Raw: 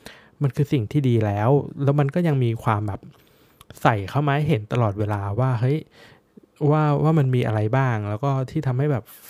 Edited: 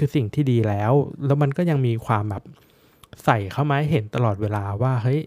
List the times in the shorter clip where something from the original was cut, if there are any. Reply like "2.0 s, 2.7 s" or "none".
none